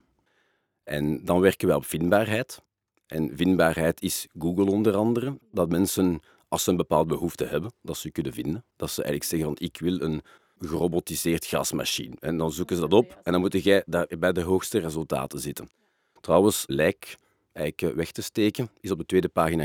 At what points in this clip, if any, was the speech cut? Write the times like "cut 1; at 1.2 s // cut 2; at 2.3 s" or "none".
cut 1; at 13.9 s // cut 2; at 16.7 s